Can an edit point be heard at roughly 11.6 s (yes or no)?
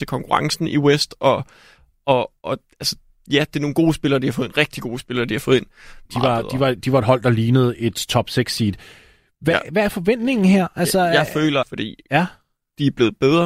yes